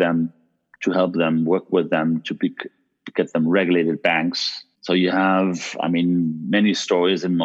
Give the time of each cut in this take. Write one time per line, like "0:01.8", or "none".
0:04.7